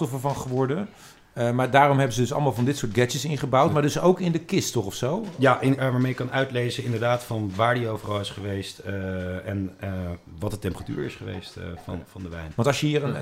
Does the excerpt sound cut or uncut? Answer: cut